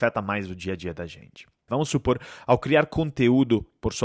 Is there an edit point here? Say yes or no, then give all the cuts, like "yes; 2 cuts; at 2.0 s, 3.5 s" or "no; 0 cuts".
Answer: yes; 1 cut; at 1.7 s